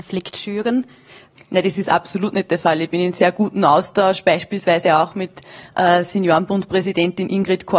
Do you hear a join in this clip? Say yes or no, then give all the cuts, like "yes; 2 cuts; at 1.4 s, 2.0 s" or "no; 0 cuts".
yes; 1 cut; at 1.3 s